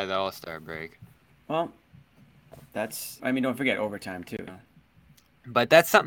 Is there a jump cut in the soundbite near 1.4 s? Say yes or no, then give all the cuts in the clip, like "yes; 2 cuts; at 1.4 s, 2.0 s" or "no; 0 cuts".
no; 2 cuts; at 3.2 s, 4.5 s